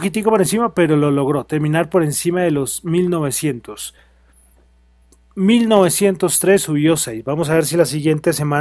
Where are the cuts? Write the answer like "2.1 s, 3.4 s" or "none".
none